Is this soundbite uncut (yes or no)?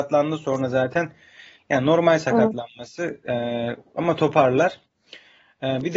yes